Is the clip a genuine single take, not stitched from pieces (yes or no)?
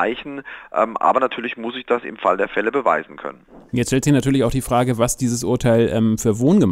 yes